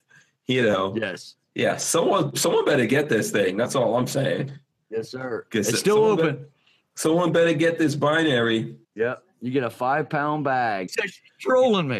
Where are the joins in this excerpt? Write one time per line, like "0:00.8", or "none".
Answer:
0:08.8
0:10.9